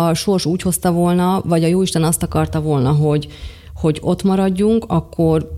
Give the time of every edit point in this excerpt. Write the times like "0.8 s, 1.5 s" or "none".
none